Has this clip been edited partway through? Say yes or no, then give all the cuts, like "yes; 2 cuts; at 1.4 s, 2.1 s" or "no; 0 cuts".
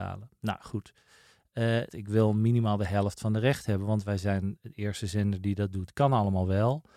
yes; 1 cut; at 1.9 s